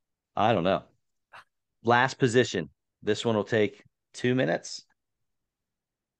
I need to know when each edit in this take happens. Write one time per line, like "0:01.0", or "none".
0:01.7